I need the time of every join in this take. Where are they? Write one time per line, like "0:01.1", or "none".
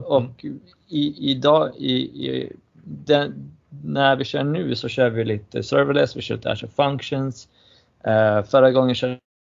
none